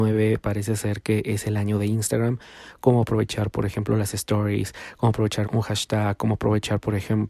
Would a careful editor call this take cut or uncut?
cut